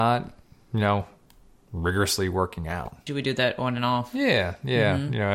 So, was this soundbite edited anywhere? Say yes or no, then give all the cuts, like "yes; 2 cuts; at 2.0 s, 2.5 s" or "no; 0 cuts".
yes; 1 cut; at 3.1 s